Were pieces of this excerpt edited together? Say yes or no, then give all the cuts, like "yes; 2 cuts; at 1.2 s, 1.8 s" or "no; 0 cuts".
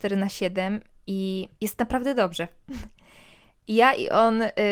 yes; 1 cut; at 1.5 s